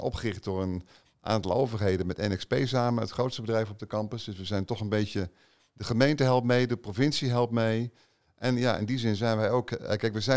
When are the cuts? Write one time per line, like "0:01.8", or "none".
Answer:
0:05.6
0:08.2